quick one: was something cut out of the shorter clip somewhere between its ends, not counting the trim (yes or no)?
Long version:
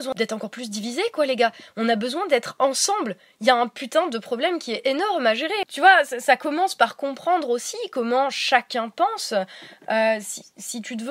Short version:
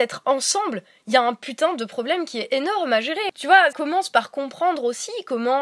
yes